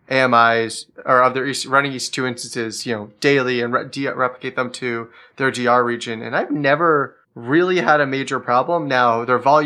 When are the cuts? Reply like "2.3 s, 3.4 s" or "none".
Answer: 7.2 s